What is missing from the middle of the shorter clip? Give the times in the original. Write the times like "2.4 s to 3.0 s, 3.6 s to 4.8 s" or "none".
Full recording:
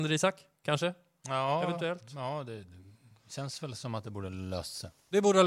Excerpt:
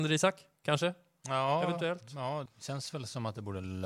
2.5 s to 3.1 s